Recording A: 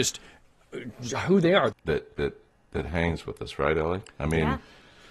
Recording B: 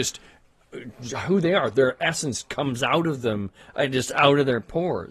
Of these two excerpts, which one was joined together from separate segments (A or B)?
A